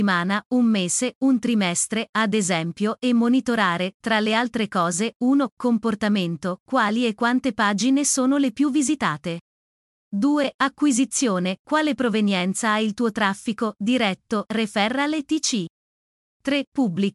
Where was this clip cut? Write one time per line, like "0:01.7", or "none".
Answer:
0:14.5